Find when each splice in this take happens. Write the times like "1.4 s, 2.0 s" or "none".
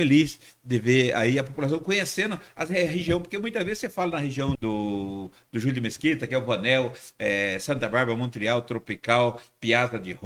4.6 s